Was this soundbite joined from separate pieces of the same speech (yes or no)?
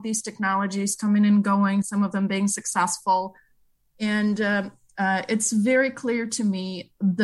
yes